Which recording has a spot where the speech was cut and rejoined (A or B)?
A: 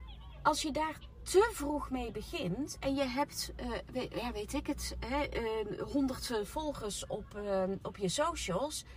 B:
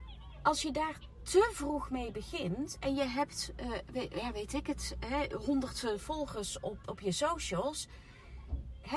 B